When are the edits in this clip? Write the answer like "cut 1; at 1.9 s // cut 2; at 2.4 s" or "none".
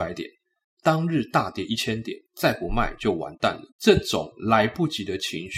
cut 1; at 2.3 s // cut 2; at 3.7 s